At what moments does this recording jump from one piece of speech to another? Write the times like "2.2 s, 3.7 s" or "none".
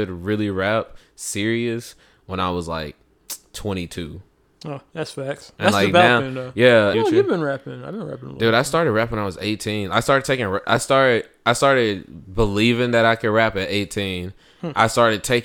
6.9 s